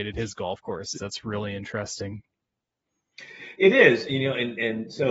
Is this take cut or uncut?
cut